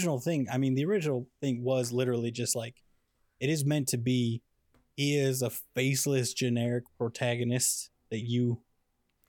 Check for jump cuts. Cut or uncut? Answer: uncut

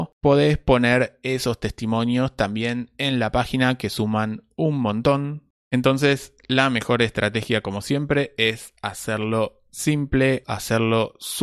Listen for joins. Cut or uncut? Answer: cut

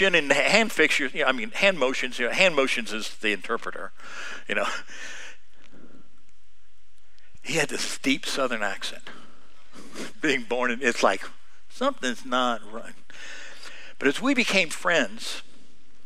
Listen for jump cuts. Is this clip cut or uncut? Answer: cut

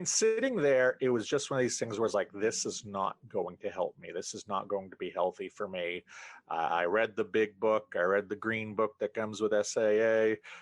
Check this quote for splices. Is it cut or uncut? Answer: uncut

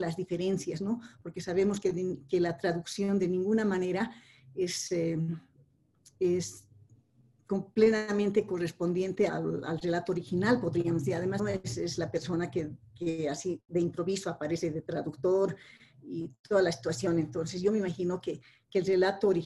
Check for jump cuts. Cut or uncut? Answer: cut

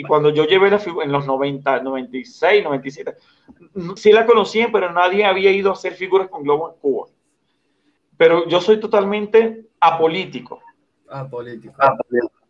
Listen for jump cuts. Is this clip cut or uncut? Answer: cut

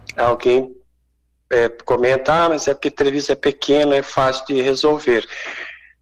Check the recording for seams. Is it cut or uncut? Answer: uncut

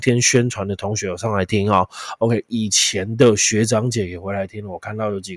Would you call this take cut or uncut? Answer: uncut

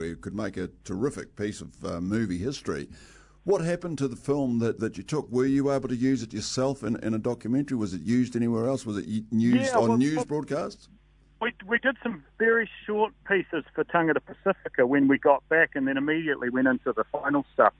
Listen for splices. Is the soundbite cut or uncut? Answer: cut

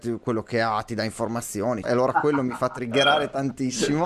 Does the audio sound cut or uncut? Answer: cut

